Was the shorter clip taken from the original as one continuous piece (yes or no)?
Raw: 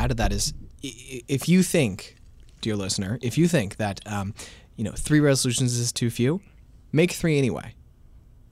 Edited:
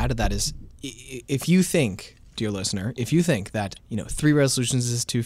no